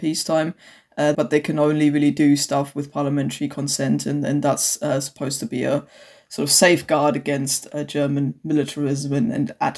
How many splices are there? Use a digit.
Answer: 1